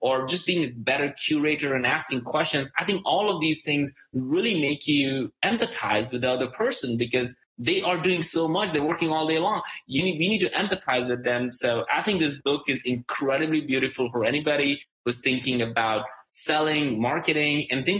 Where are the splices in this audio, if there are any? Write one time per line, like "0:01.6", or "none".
none